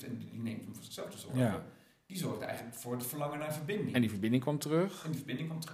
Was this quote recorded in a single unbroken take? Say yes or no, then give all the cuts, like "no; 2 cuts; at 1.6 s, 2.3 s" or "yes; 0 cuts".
yes; 0 cuts